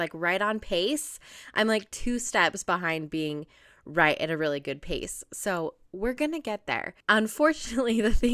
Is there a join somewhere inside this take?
yes; 1 cut; at 7.0 s

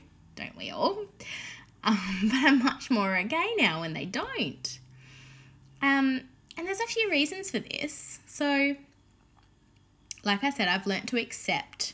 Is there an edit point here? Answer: no; 0 cuts

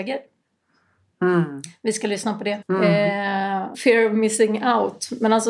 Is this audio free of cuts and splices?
no; 2 cuts; at 2.6 s, 3.7 s

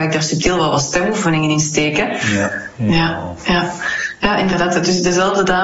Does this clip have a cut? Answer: yes; 1 cut; at 2.7 s

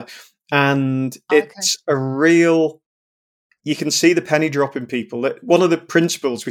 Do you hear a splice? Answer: no; 0 cuts

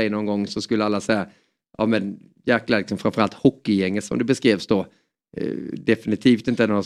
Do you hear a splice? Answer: no; 0 cuts

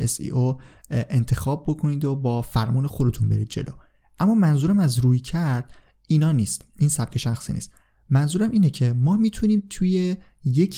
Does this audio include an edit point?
no; 0 cuts

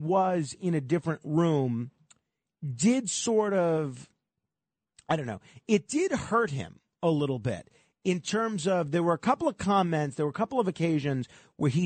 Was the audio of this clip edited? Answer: no; 0 cuts

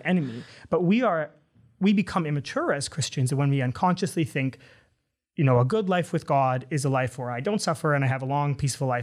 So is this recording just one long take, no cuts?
yes; 0 cuts

